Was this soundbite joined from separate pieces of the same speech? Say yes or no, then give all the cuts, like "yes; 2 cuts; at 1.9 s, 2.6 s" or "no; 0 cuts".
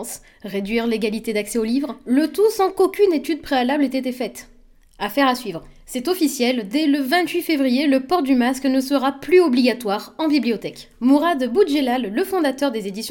no; 0 cuts